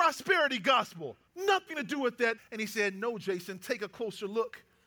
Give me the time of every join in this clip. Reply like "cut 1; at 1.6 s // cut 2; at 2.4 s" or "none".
cut 1; at 1.3 s // cut 2; at 2.4 s